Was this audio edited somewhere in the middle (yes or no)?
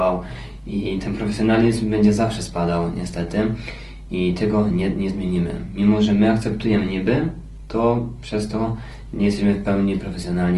no